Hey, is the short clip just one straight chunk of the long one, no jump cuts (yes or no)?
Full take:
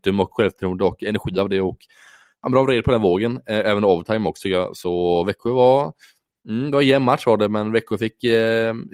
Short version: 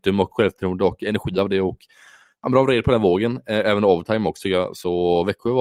yes